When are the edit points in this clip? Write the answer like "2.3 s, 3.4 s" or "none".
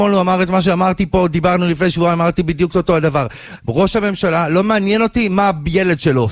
3.6 s